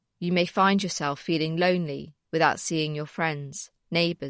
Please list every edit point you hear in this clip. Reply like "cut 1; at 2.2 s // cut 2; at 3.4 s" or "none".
none